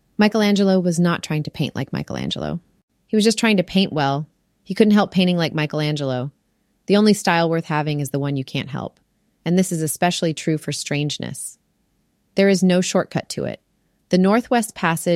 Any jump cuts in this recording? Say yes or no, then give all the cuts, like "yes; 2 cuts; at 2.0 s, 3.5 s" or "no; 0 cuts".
no; 0 cuts